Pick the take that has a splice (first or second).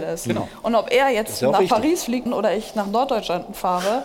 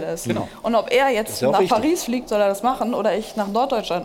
first